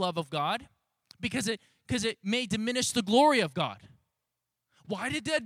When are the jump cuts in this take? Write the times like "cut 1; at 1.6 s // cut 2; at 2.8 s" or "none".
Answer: none